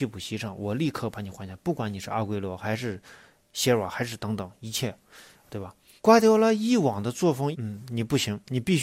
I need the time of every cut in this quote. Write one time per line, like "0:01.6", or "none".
0:06.0
0:07.5